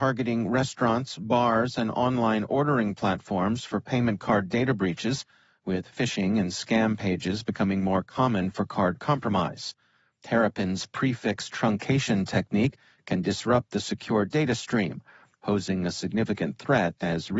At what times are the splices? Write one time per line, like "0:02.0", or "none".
0:10.2